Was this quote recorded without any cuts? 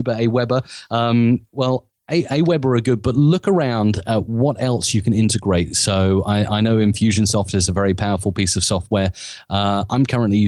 yes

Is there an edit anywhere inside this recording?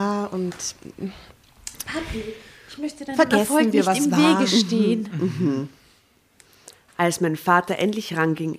no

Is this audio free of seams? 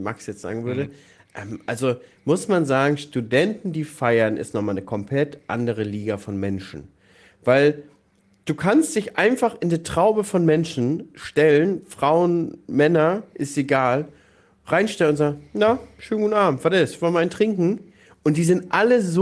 yes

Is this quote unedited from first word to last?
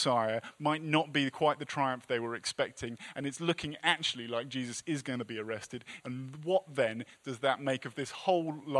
no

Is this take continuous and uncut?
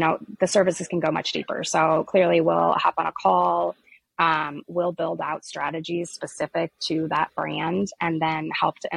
yes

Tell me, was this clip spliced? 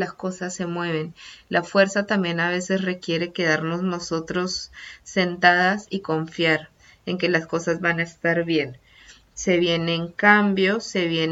no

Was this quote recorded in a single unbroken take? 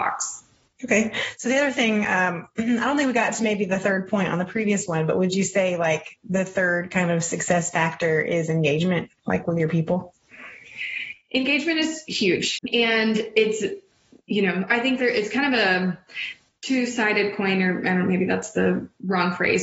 no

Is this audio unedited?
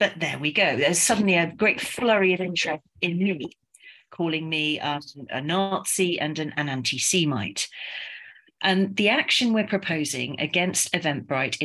no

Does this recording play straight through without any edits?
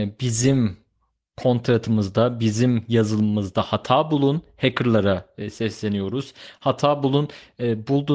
yes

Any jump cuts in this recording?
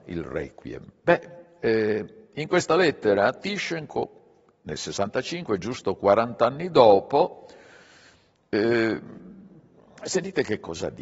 no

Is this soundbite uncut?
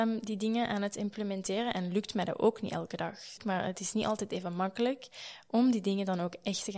no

